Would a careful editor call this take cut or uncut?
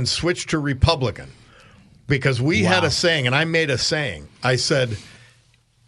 uncut